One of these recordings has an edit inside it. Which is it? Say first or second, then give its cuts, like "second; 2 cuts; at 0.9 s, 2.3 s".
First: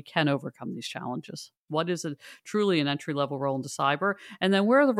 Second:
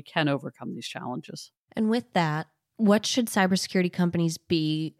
first; 1 cut; at 1.7 s